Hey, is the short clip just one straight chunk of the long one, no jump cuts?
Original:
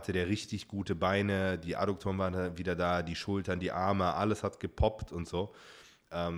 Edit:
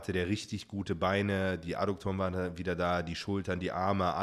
yes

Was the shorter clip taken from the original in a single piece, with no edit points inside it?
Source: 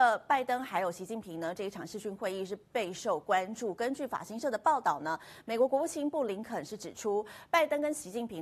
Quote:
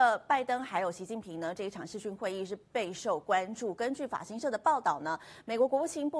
yes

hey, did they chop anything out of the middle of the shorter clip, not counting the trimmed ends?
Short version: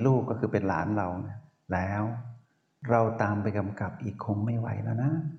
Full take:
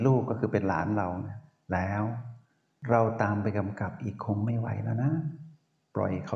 no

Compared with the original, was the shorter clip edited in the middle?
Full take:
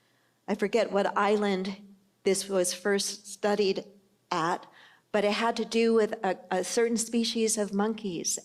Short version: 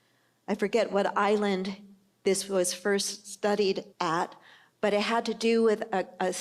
yes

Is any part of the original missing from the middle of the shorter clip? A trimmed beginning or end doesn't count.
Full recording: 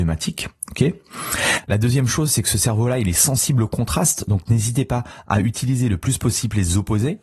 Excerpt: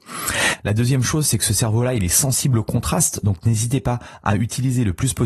no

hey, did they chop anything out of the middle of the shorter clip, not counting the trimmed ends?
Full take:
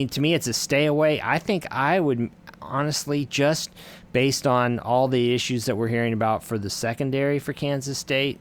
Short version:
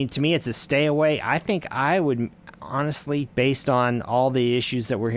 yes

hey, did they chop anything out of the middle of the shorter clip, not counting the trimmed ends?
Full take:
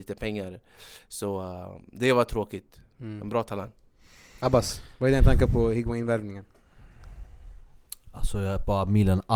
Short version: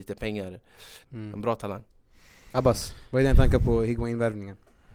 yes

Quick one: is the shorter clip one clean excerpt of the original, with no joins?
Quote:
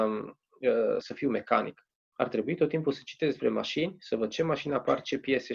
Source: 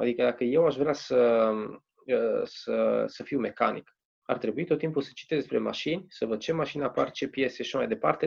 no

